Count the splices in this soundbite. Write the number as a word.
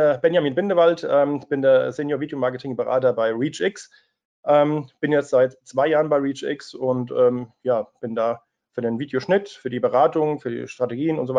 zero